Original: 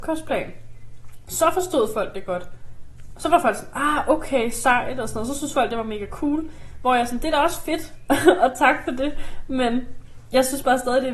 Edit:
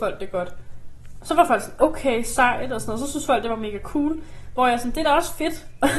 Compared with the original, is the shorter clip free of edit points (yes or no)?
no